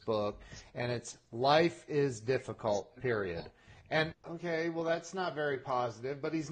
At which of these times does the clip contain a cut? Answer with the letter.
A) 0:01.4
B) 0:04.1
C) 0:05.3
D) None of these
B